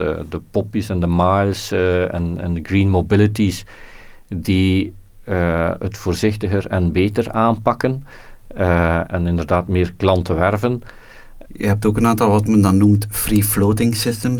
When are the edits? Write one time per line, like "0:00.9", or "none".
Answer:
0:09.1
0:11.5